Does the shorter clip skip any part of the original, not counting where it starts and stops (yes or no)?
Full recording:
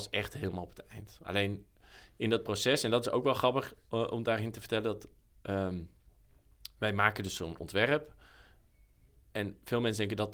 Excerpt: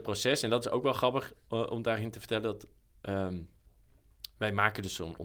no